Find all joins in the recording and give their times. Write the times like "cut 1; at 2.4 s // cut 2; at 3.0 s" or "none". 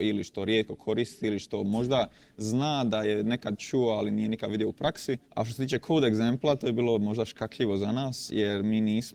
cut 1; at 5.2 s